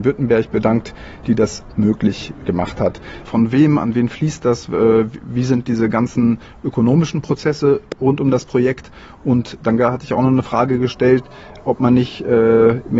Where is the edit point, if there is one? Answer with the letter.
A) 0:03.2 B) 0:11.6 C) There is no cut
A